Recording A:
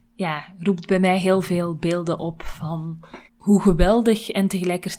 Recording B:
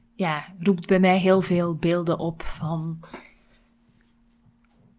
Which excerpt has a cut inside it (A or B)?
A